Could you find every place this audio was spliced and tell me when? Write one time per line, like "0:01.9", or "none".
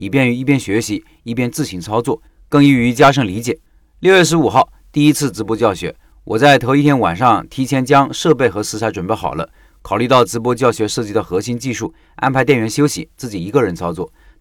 none